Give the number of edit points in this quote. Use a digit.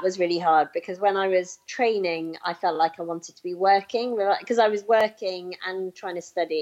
0